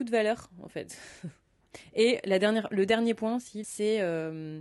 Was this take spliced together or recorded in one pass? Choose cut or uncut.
cut